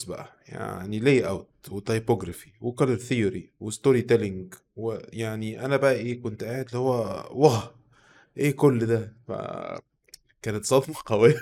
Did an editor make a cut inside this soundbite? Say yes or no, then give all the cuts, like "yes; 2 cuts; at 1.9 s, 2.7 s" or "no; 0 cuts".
no; 0 cuts